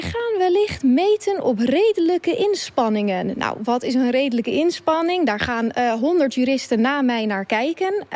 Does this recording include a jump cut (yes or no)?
no